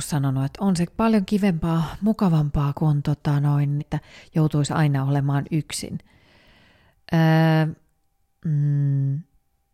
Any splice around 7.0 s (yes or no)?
no